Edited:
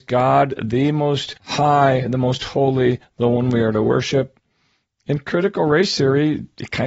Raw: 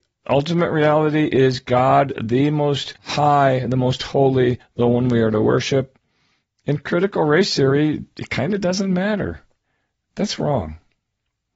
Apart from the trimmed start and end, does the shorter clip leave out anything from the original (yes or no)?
no